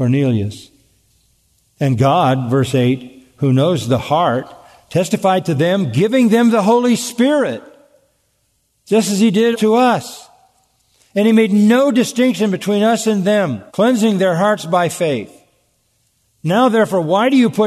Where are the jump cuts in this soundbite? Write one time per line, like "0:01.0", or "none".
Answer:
0:09.5
0:13.7